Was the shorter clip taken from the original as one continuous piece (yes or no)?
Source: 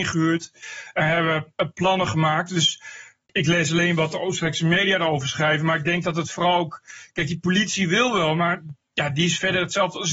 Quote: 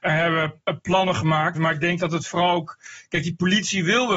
no